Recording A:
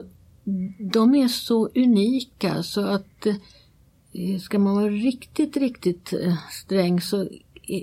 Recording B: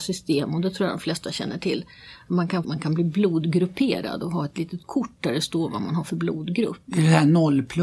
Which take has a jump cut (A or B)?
B